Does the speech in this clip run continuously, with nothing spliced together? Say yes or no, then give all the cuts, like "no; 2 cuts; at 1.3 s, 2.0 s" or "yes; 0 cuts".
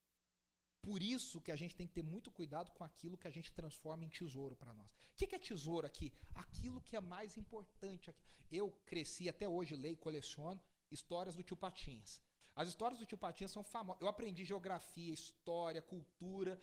yes; 0 cuts